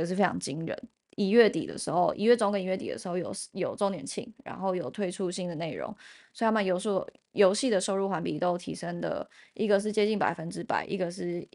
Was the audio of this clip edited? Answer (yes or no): yes